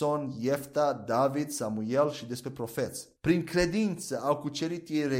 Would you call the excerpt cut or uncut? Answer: cut